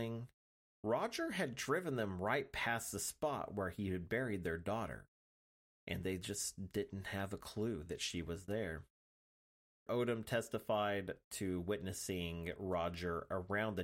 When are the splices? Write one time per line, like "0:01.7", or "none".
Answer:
0:09.9